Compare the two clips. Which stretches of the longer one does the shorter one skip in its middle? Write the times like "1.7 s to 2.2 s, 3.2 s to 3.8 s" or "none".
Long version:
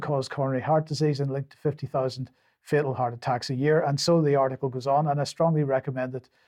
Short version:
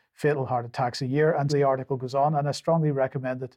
4.0 s to 4.2 s